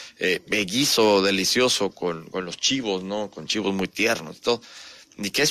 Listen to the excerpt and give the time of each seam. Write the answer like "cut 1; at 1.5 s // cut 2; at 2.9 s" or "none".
none